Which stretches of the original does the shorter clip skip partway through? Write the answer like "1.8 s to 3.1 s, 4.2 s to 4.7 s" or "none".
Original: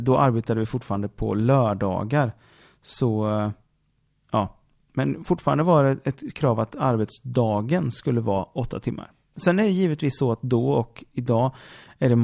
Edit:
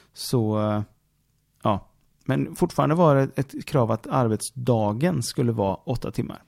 none